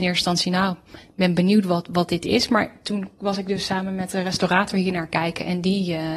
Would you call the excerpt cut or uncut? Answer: uncut